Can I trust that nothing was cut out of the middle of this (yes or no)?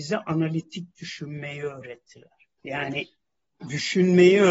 no